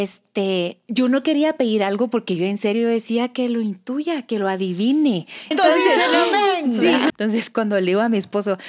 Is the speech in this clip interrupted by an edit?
yes; 2 cuts; at 5.5 s, 7.1 s

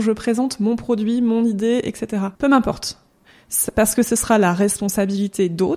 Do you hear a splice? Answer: yes; 1 cut; at 2.4 s

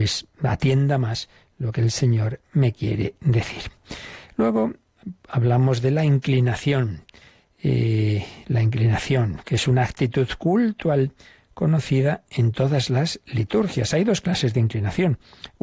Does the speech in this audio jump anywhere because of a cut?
no; 0 cuts

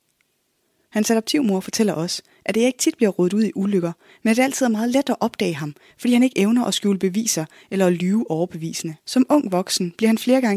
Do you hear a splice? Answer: yes; 1 cut; at 9.0 s

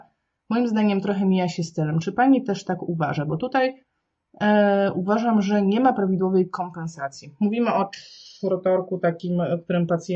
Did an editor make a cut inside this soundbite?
no; 0 cuts

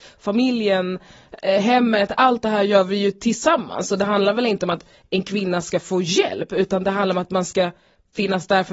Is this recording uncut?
yes; 0 cuts

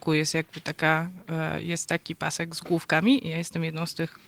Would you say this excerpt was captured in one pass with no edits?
yes; 0 cuts

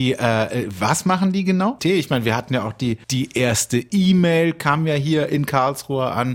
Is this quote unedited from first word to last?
no; 2 cuts; at 1.8 s, 3.0 s

